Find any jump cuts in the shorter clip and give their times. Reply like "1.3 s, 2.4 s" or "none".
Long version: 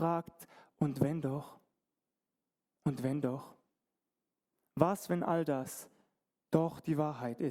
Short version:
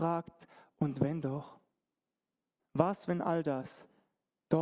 2.6 s